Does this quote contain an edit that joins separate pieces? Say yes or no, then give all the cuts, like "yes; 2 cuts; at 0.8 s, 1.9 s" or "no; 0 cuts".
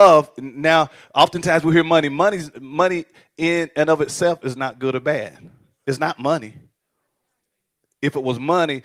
no; 0 cuts